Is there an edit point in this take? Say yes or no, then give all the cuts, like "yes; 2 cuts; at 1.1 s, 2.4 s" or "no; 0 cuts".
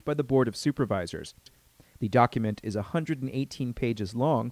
yes; 1 cut; at 1.9 s